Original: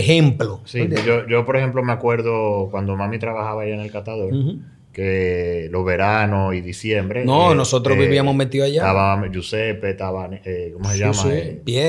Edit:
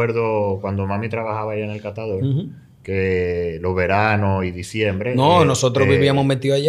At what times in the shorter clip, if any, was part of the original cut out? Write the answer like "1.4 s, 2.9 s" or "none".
none

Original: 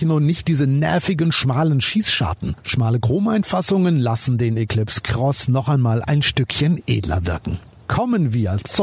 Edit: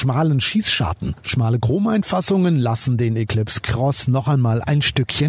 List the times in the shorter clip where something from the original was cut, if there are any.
none

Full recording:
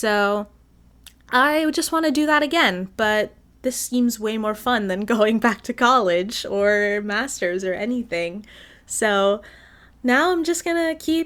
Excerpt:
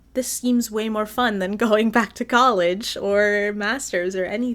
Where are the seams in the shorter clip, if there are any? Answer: none

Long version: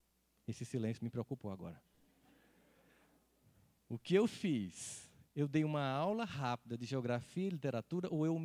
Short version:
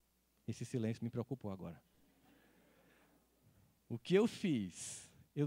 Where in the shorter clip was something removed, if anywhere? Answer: none

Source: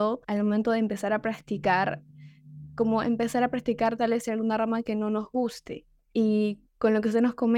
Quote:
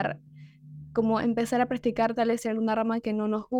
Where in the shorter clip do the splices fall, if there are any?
none

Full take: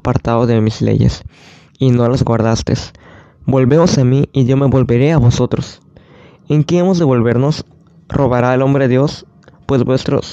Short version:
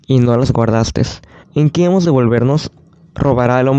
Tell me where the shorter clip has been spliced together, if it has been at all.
1.4 s

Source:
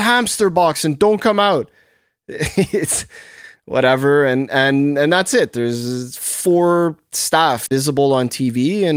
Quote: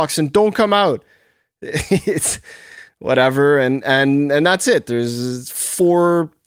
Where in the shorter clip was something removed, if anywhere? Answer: none

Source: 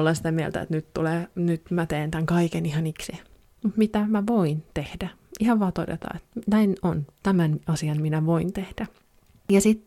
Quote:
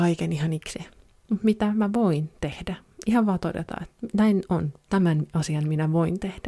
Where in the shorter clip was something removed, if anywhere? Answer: none

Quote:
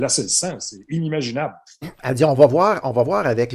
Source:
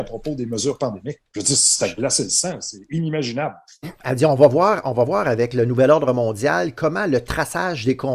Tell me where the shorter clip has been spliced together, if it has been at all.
none

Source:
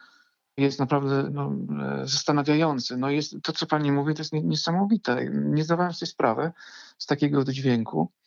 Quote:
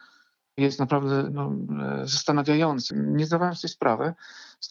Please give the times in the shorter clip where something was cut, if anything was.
2.9 s

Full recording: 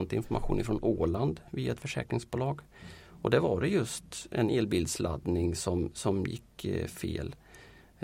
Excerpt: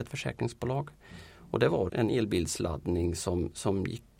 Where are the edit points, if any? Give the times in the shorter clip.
1.9 s

